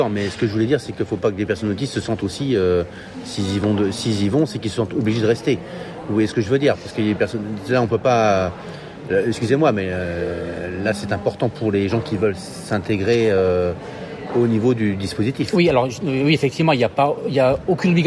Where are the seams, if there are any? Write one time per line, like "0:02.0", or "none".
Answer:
none